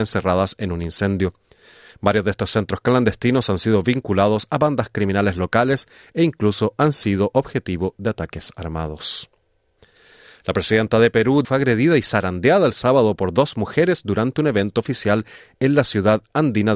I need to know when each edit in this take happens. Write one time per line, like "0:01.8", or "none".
0:11.4